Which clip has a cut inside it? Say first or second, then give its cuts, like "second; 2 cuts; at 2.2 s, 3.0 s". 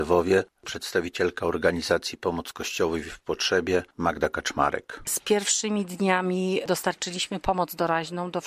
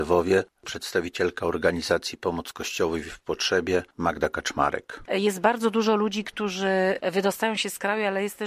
second; 1 cut; at 5.0 s